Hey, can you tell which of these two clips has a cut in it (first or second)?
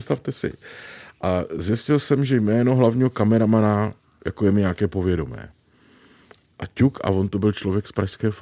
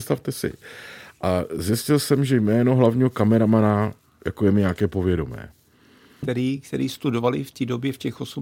second